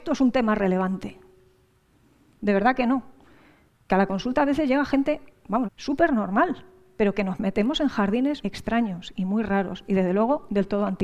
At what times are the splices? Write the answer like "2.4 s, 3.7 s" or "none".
2.4 s, 5.6 s, 8.4 s